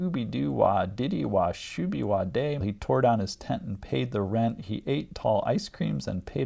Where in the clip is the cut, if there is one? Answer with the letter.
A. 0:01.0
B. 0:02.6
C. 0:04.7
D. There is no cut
B